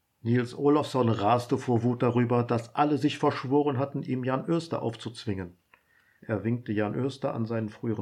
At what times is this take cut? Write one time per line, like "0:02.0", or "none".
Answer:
0:06.2